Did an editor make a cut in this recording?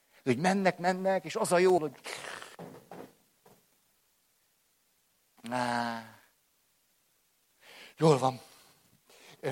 yes; 1 cut; at 1.8 s

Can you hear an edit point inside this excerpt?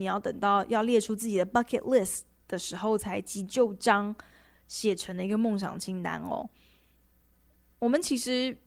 no; 0 cuts

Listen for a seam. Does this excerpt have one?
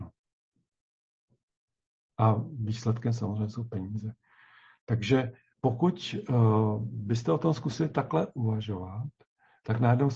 yes; 1 cut; at 5.5 s

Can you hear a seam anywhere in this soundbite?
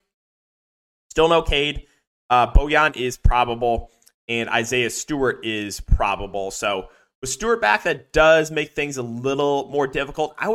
no; 0 cuts

